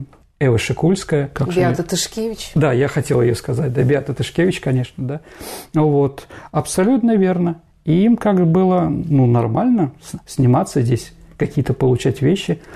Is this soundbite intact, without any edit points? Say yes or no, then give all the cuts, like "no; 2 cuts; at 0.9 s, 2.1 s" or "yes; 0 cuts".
yes; 0 cuts